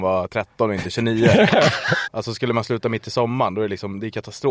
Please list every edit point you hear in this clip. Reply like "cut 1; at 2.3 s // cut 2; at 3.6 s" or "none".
cut 1; at 2.0 s